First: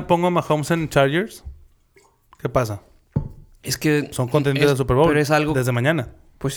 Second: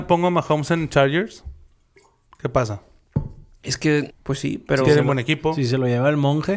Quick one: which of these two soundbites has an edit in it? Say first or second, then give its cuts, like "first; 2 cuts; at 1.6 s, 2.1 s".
second; 1 cut; at 4.1 s